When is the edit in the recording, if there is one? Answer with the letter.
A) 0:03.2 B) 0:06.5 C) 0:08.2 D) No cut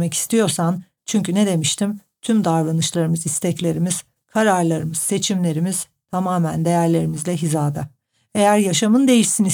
D